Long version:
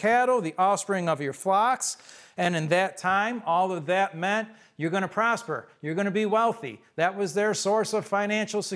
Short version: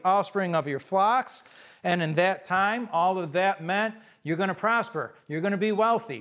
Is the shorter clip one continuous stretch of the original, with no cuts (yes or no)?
yes